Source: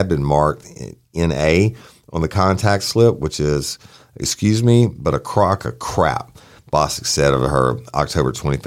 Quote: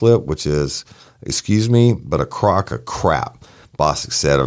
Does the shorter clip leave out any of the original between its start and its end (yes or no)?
no